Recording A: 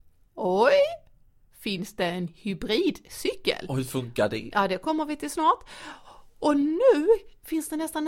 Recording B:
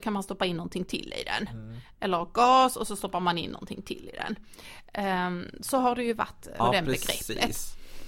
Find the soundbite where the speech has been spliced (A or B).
B